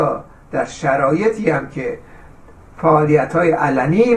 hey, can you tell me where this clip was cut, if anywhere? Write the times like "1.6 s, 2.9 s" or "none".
none